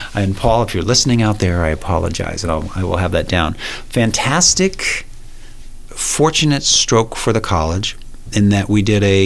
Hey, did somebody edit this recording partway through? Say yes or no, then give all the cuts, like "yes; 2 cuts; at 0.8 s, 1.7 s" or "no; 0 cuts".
no; 0 cuts